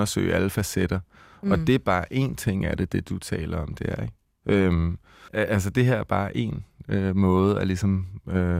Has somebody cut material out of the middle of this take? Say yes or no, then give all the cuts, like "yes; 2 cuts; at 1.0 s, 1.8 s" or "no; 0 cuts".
yes; 1 cut; at 5.3 s